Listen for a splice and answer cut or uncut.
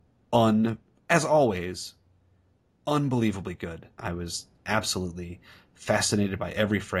cut